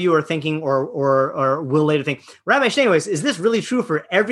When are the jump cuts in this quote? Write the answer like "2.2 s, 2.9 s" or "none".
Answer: none